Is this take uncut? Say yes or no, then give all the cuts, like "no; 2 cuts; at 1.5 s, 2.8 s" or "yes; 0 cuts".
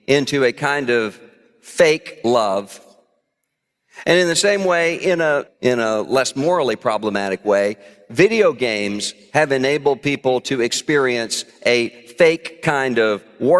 no; 1 cut; at 5.5 s